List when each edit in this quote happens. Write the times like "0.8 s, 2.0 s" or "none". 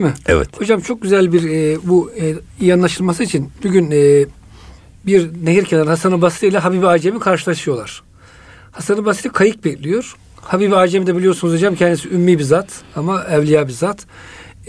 none